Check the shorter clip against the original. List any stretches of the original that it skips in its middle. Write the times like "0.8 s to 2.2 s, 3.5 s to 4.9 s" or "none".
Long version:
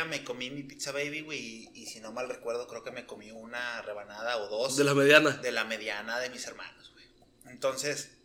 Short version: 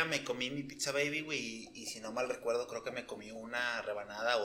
none